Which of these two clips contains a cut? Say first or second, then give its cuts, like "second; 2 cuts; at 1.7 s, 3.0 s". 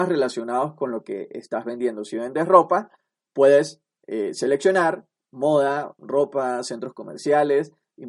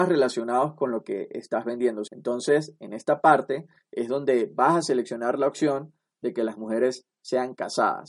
second; 1 cut; at 2.1 s